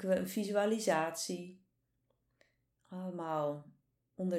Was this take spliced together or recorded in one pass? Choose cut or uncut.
uncut